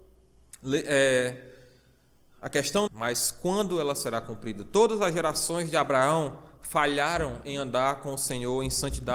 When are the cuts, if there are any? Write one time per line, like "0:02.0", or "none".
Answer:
0:02.9